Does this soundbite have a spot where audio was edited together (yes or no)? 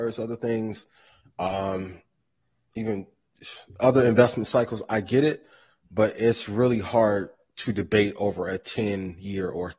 no